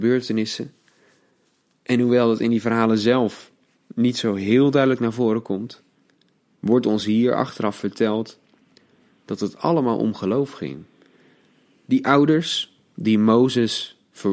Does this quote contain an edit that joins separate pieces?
no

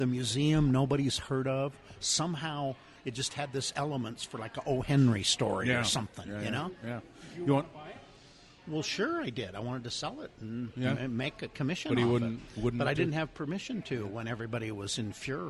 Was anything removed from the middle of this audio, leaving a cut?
no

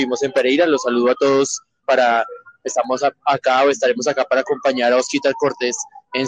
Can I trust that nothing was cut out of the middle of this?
no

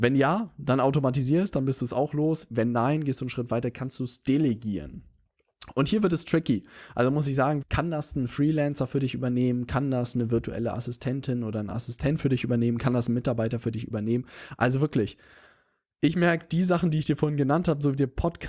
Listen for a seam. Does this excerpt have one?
yes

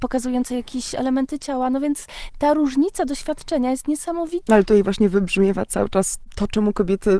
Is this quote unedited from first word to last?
no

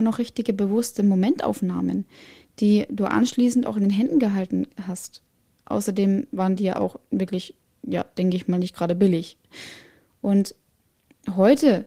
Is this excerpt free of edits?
yes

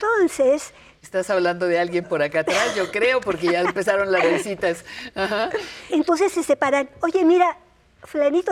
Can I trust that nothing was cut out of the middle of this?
no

